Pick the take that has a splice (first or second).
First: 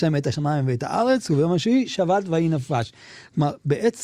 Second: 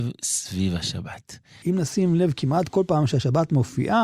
second